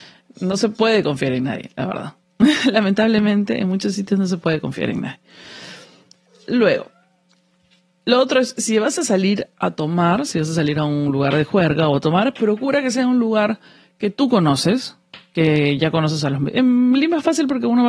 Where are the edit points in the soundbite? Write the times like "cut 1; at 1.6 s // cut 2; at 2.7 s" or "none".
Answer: none